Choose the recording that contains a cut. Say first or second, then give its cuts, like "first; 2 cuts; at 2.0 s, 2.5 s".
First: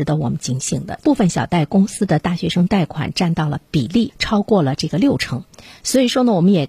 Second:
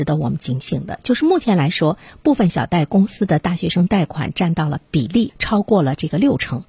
first; 1 cut; at 1.0 s